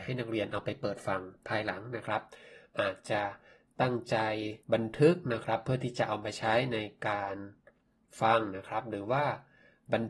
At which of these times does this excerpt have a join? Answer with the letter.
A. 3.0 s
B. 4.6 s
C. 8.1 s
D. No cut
B